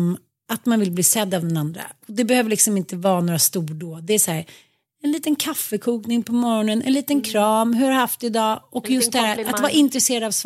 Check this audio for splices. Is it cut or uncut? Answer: uncut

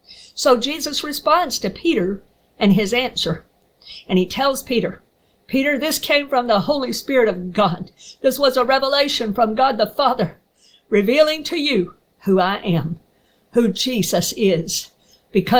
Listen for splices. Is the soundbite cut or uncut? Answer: uncut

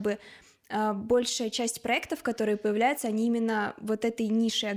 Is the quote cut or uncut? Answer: uncut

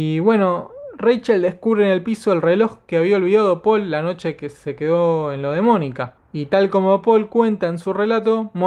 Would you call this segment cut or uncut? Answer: uncut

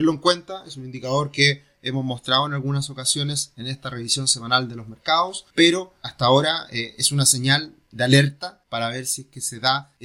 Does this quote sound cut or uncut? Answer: uncut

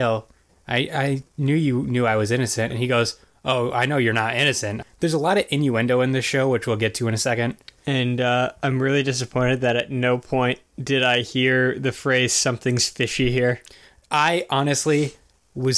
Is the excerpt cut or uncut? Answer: cut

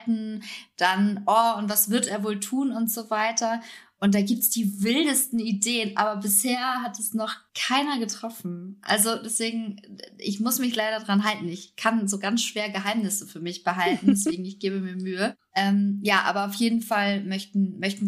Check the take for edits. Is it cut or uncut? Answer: uncut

